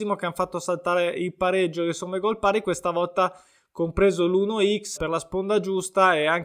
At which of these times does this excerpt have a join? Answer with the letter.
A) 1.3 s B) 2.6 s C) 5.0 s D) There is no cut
C